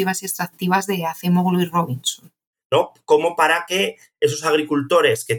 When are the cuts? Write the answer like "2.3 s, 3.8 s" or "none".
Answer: 2.6 s